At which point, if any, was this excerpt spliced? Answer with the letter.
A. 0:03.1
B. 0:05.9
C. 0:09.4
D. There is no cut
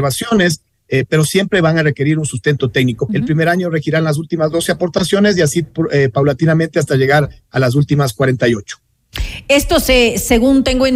A